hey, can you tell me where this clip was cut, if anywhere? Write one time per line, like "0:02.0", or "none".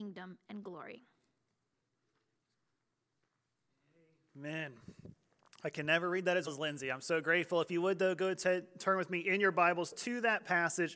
0:06.5